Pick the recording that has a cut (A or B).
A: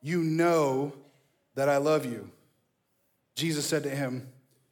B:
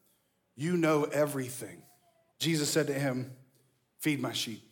B